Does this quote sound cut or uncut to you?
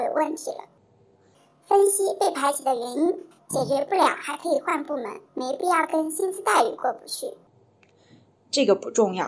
cut